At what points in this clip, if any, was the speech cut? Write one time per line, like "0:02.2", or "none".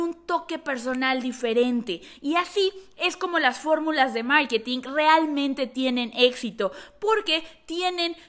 none